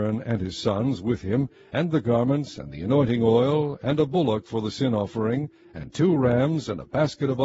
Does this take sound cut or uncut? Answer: uncut